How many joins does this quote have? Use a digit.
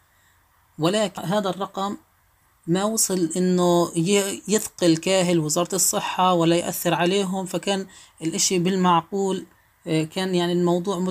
1